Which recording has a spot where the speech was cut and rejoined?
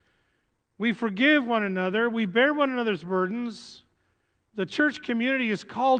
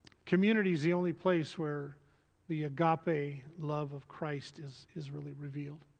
first; 1 cut; at 4.5 s

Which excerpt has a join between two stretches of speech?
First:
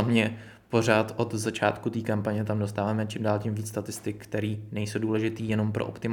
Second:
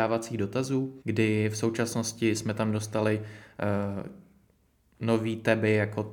second; 1 cut; at 1.0 s

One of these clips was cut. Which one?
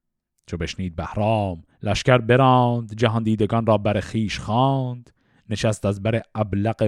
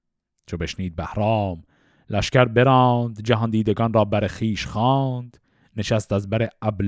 first; 1 cut; at 1.7 s

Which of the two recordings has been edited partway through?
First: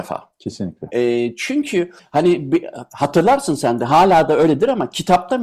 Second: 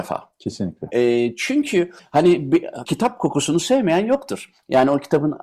second; 1 cut; at 2.8 s

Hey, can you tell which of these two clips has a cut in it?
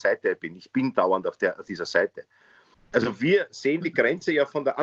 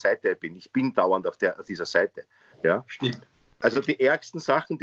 second; 1 cut; at 2.5 s

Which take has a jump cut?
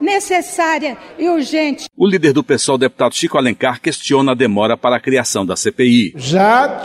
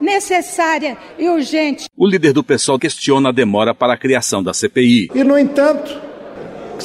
second; 2 cuts; at 2.8 s, 5.1 s

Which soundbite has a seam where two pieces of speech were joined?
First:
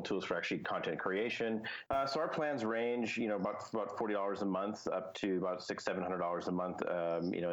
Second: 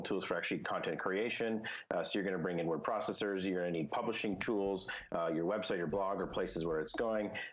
first; 1 cut; at 1.9 s

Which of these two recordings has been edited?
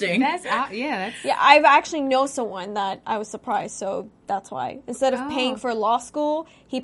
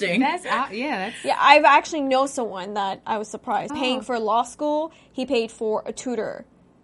second; 1 cut; at 3.7 s

